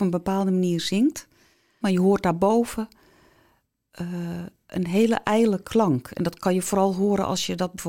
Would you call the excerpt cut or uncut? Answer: cut